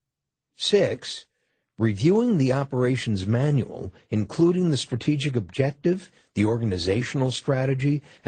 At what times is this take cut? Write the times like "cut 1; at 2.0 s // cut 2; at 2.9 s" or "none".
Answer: none